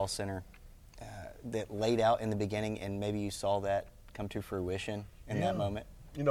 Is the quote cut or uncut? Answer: uncut